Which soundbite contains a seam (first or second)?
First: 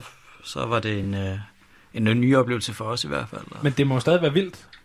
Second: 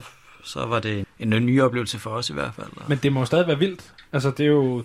second